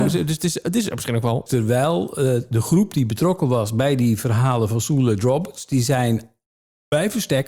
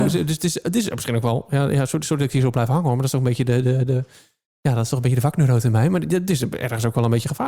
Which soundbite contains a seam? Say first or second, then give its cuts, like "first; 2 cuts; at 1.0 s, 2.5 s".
first; 1 cut; at 1.5 s